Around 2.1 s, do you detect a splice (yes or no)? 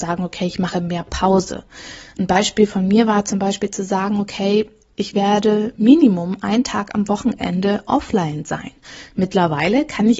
no